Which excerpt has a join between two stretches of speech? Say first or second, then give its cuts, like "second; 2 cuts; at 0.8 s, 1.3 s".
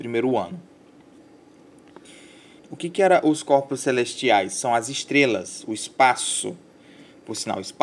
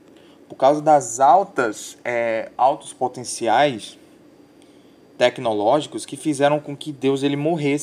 first; 1 cut; at 2.6 s